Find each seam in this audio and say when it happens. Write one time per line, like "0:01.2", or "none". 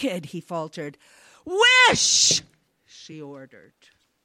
none

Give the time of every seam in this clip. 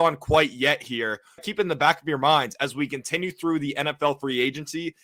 0:01.4

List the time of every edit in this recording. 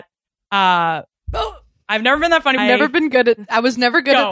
0:02.6

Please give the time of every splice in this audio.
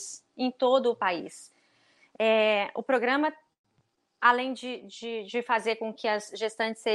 none

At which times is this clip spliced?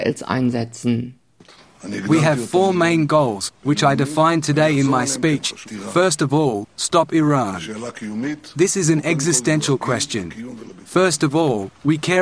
0:05.6

